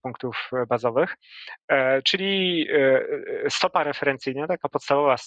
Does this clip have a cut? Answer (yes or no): no